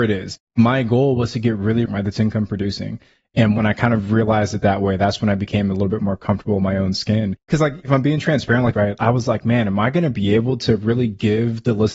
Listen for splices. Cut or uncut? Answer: cut